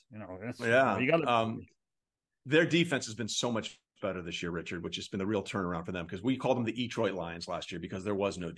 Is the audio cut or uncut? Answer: uncut